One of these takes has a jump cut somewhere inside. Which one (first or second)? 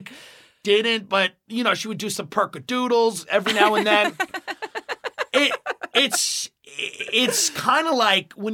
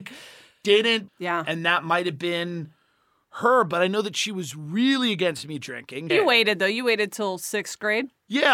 second